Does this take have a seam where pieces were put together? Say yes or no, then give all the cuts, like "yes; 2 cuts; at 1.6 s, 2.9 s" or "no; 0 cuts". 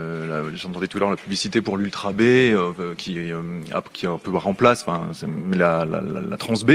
no; 0 cuts